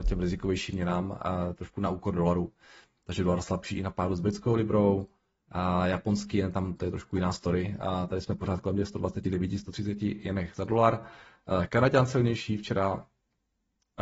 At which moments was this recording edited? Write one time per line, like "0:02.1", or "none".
none